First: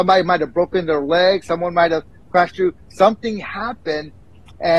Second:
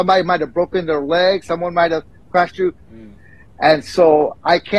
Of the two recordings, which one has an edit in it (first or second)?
second